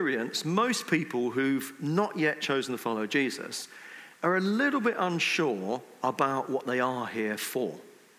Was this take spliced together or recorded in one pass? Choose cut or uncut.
uncut